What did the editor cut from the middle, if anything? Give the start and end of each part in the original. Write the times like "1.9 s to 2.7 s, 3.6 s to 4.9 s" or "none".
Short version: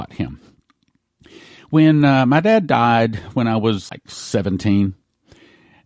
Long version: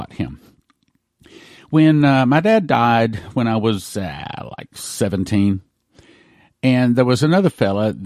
3.9 s to 4.6 s